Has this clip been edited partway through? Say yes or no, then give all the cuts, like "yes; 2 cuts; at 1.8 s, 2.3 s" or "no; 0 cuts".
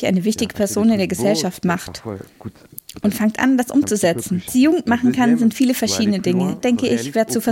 yes; 2 cuts; at 4.5 s, 6.6 s